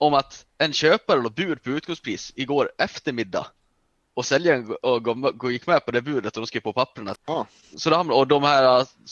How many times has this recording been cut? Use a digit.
1